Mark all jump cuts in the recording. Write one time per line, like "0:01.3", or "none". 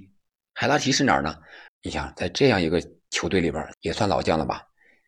0:01.7
0:03.7